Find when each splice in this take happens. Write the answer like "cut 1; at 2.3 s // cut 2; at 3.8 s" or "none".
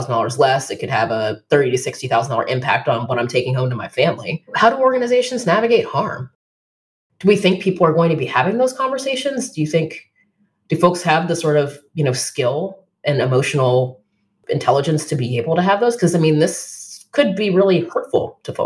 none

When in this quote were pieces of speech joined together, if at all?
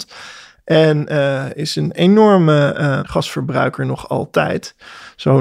cut 1; at 3.0 s

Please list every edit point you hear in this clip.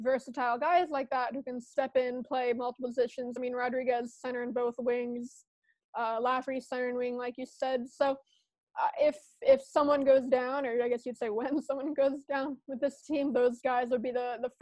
none

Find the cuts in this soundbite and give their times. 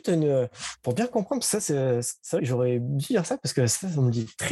cut 1; at 2.4 s

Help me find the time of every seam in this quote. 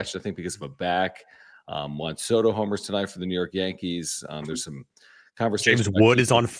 none

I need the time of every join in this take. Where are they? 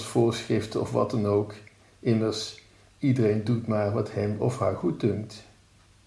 none

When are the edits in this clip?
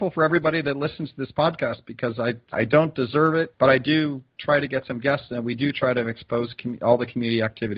cut 1; at 2.5 s // cut 2; at 3.5 s

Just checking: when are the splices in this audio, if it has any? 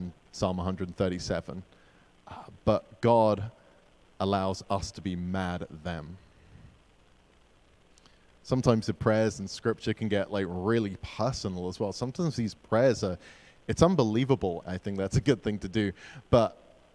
cut 1; at 14.6 s

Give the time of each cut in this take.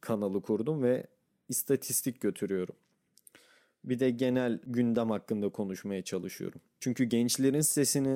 none

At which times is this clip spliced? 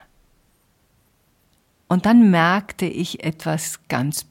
cut 1; at 1.7 s

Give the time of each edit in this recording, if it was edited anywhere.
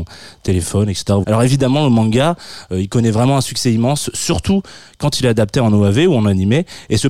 cut 1; at 1.2 s

